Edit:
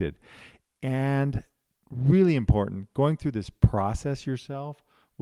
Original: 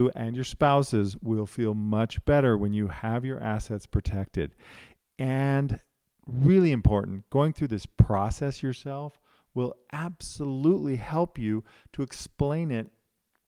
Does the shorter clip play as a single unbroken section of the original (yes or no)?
yes